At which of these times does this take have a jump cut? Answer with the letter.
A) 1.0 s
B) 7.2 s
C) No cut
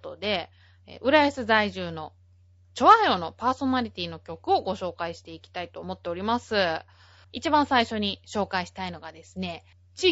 B